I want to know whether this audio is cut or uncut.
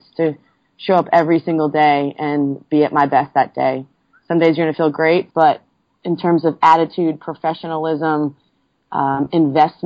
cut